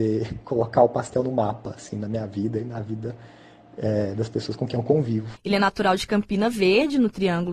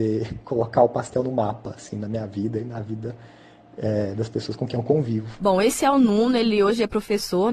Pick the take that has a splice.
first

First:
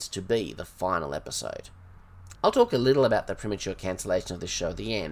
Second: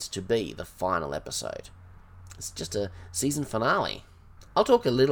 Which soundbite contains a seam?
first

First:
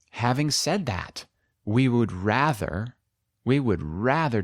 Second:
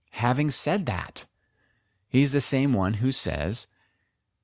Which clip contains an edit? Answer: first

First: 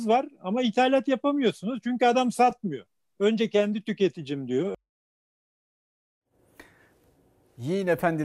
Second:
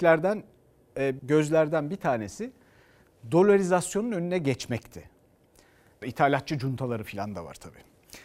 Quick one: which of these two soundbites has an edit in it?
second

